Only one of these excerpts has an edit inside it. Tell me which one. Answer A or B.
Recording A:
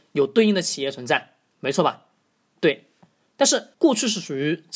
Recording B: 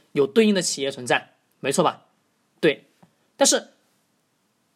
A